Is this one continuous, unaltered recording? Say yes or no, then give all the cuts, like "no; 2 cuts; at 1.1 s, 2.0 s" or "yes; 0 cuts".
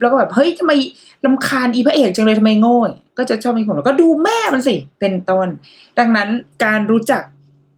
no; 2 cuts; at 4.9 s, 6.5 s